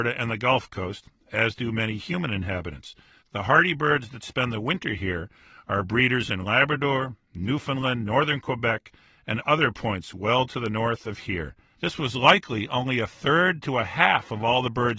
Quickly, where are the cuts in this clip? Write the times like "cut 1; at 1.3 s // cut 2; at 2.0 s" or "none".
cut 1; at 11.7 s